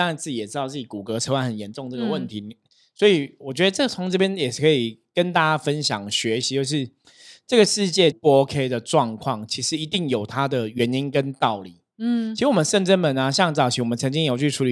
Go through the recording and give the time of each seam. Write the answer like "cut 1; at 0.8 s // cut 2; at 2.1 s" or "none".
cut 1; at 8.1 s